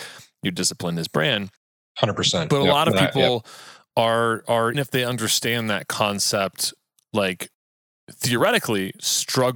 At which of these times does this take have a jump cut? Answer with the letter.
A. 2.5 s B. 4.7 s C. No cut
B